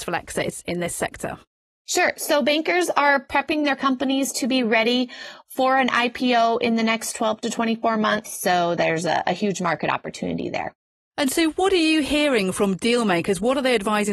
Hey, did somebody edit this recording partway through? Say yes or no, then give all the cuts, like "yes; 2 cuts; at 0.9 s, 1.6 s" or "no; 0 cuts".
yes; 1 cut; at 8.2 s